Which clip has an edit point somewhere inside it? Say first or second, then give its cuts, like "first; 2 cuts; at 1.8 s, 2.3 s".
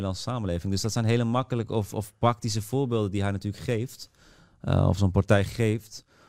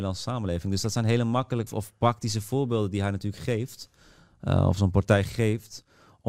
second; 1 cut; at 1.7 s